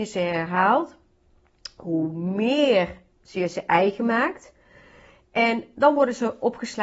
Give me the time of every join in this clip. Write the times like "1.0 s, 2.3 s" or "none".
none

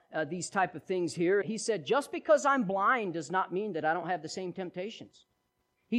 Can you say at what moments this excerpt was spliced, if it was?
1.4 s

